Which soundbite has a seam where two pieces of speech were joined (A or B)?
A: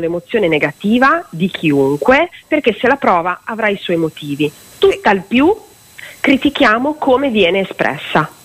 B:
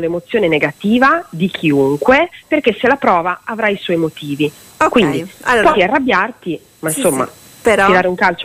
B